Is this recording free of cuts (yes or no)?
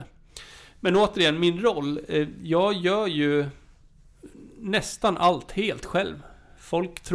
yes